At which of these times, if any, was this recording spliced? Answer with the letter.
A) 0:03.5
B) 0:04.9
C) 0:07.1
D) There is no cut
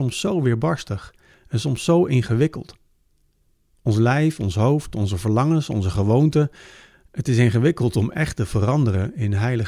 D